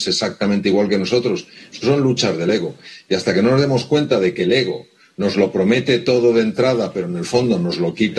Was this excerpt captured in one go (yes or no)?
yes